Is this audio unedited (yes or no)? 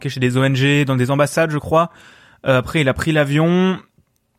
yes